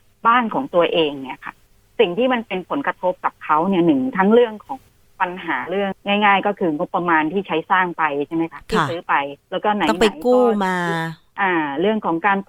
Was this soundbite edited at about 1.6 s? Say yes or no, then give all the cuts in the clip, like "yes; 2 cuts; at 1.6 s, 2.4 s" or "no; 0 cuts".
no; 2 cuts; at 5.9 s, 9.4 s